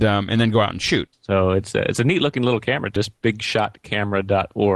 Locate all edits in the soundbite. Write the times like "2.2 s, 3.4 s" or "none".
1.1 s, 3.0 s